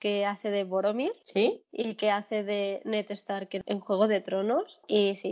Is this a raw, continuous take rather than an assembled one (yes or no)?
yes